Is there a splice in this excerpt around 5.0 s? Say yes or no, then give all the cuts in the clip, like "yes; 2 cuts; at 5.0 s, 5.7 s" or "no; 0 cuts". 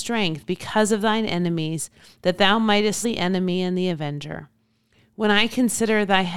no; 1 cut; at 3.0 s